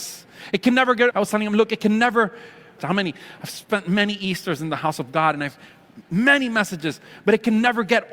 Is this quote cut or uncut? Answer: cut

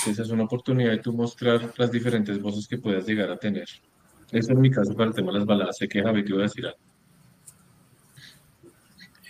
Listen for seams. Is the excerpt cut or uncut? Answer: cut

